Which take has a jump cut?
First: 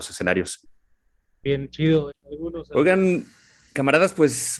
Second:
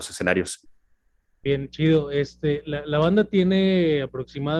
first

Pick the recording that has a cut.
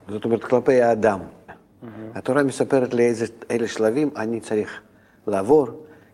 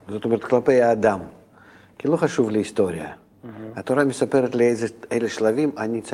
first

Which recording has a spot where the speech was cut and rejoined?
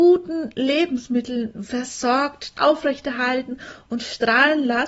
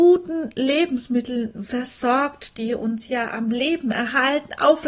first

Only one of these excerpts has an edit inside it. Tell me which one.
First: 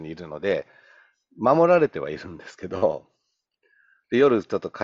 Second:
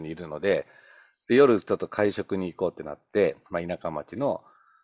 second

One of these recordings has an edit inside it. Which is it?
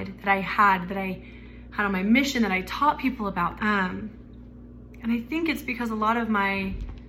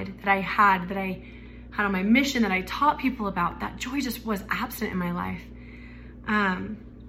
first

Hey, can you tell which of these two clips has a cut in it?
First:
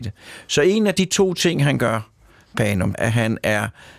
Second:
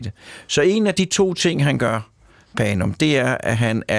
first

